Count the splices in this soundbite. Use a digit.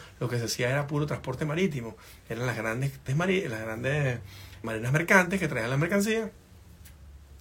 2